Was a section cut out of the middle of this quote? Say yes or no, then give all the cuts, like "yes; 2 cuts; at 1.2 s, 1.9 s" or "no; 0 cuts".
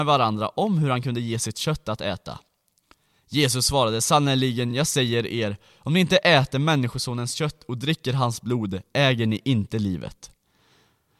no; 0 cuts